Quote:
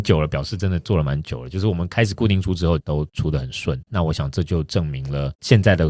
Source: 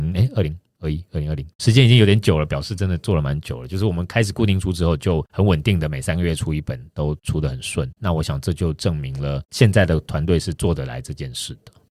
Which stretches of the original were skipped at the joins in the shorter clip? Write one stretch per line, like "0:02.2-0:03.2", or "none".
0:05.0-0:06.9